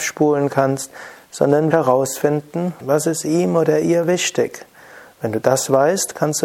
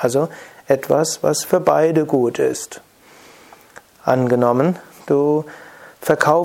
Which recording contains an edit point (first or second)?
first